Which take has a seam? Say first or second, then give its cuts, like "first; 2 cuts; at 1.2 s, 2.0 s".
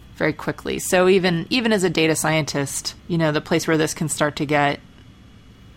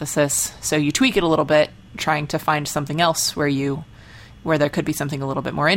first; 1 cut; at 3.0 s